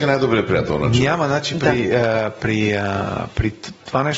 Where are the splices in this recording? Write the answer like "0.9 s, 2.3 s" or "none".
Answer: none